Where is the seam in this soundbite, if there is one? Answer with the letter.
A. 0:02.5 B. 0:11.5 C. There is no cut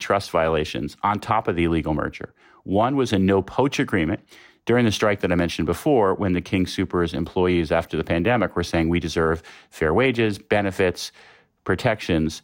C